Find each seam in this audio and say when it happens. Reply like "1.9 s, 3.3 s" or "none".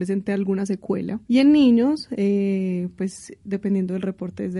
1.2 s